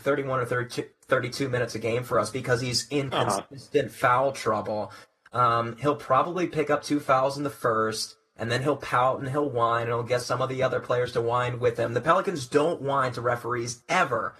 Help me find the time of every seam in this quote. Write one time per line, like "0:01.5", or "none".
none